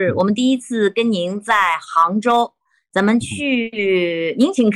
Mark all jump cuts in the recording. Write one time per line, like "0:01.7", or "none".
none